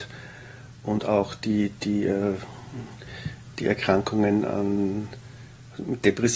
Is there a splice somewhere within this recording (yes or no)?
no